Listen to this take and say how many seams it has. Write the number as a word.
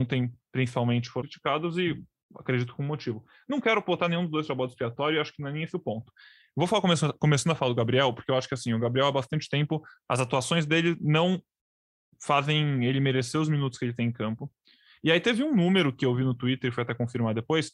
one